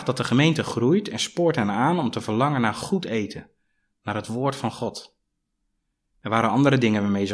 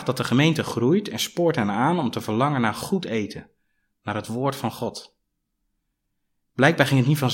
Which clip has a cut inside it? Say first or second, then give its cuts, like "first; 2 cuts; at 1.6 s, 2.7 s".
first; 1 cut; at 6.1 s